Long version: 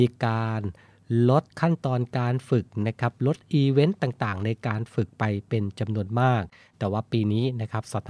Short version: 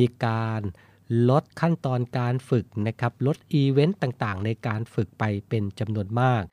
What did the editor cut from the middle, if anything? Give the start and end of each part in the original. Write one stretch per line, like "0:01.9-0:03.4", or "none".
none